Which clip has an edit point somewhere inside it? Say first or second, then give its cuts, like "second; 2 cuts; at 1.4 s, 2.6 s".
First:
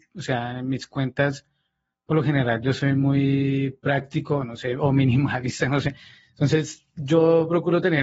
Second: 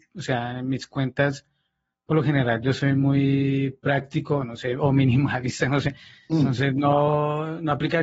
second; 1 cut; at 6.3 s